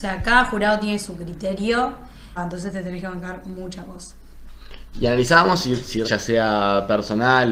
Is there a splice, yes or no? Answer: yes